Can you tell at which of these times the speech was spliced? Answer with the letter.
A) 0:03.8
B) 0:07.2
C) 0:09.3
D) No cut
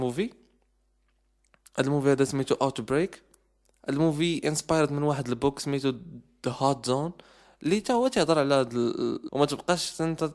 C